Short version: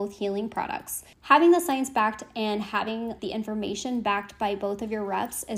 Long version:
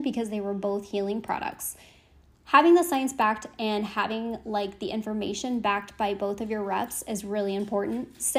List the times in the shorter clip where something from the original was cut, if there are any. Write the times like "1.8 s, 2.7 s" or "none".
1.1 s, 3.2 s